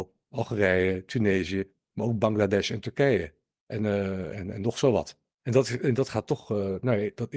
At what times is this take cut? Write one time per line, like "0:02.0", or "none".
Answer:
0:04.3